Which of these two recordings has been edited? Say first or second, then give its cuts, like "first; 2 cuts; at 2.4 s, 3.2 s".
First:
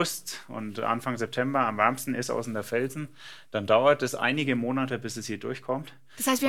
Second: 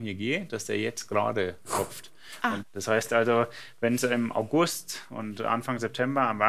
second; 1 cut; at 2.6 s